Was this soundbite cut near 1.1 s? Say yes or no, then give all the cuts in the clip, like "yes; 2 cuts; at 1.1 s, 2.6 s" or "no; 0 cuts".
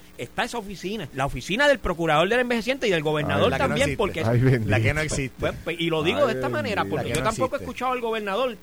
yes; 1 cut; at 1.1 s